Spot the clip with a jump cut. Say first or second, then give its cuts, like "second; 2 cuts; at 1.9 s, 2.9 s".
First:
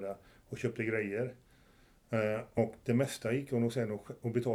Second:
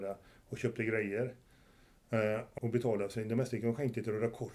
second; 1 cut; at 2.6 s